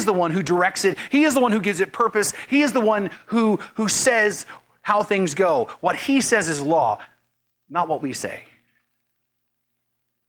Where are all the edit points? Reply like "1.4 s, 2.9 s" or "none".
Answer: none